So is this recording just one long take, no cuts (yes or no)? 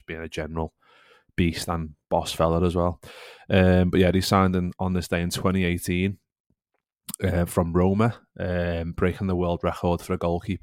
yes